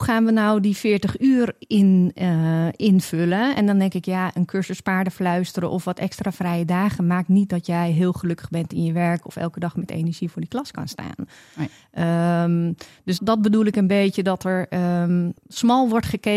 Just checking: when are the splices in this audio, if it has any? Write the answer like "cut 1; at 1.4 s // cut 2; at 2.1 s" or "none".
cut 1; at 13.2 s // cut 2; at 15.4 s

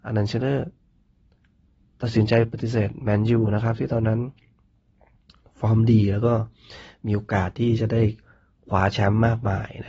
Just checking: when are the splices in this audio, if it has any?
none

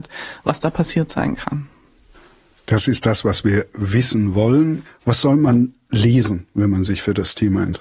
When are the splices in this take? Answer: cut 1; at 4.8 s

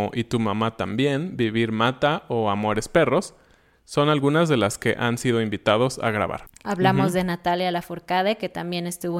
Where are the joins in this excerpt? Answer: cut 1; at 6.6 s

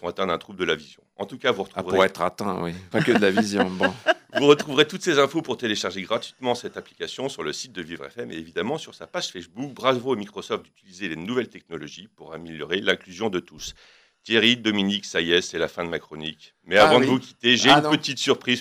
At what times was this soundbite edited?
cut 1; at 2.9 s

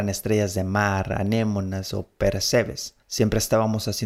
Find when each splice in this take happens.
cut 1; at 3.0 s

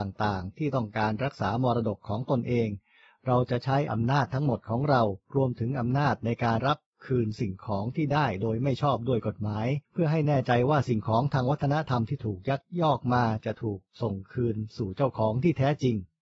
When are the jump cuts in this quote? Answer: cut 1; at 6.6 s // cut 2; at 9.8 s

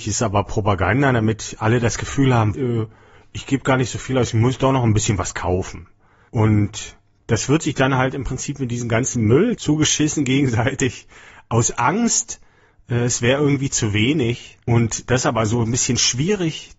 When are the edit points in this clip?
cut 1; at 2.5 s

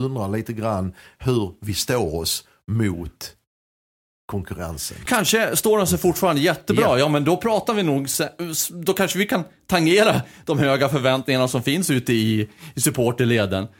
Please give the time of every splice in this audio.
none

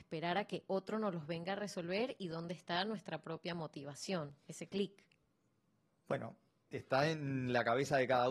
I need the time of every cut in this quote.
cut 1; at 6.6 s

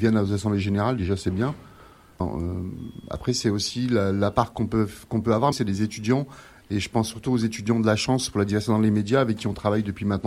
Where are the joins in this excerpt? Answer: cut 1; at 2.2 s // cut 2; at 5.5 s

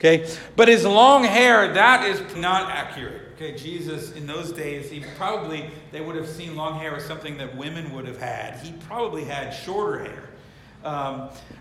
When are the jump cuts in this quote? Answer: cut 1; at 2.3 s

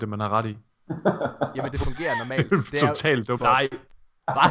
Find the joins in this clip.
cut 1; at 1.7 s // cut 2; at 3.4 s

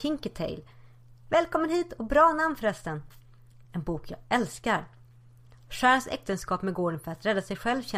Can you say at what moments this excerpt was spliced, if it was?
cut 1; at 3.6 s

